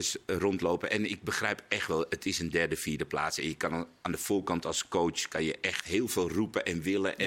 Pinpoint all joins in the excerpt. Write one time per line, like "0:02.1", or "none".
none